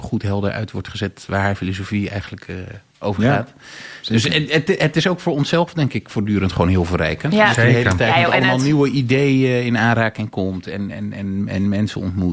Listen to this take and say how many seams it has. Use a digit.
0